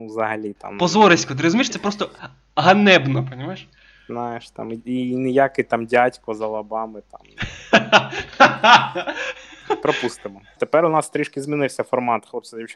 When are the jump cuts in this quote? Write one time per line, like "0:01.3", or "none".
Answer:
0:01.7
0:10.6

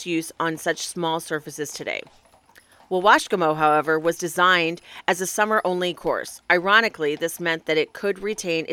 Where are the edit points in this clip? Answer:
none

